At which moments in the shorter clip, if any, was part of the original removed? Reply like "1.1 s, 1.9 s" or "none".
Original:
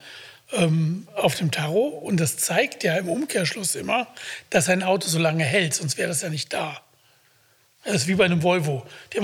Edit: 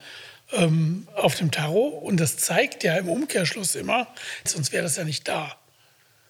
4.4 s